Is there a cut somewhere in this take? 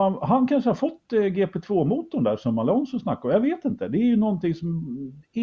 no; 0 cuts

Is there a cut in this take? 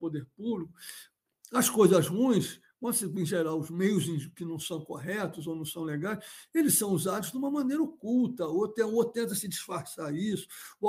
no; 0 cuts

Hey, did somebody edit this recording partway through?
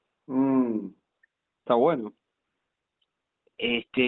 yes; 1 cut; at 1.6 s

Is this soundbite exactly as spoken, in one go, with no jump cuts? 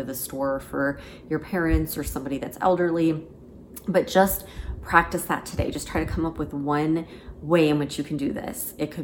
yes; 0 cuts

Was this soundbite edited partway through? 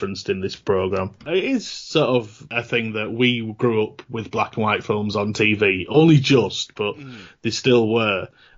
no; 0 cuts

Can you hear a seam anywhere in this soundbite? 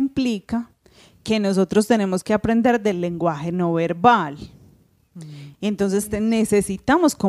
yes; 1 cut; at 5.5 s

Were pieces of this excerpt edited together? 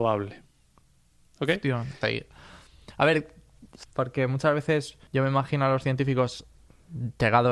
yes; 3 cuts; at 2.0 s, 3.8 s, 5.1 s

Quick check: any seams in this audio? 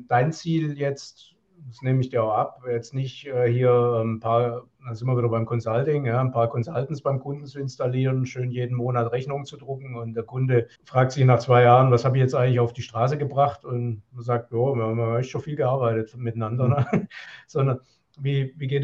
yes; 1 cut; at 10.7 s

